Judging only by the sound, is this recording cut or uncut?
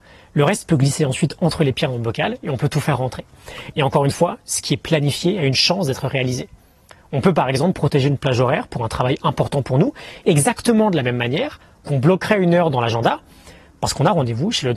cut